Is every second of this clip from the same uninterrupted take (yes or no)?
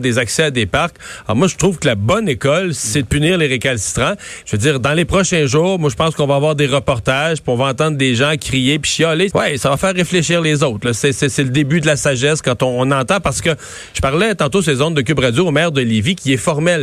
no